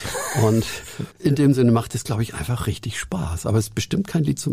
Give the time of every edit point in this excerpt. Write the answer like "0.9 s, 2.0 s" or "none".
1.1 s

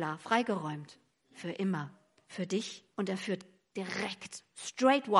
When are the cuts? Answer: 2.9 s

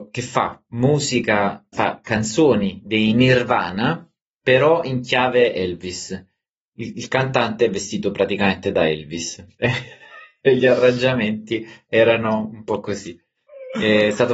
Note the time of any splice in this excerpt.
1.7 s

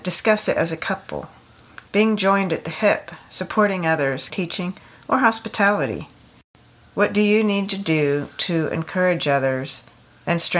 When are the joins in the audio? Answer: 4.3 s

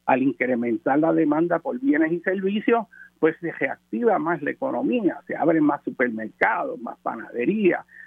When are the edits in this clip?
none

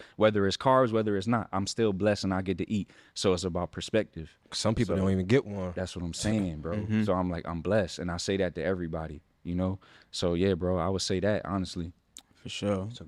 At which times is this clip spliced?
none

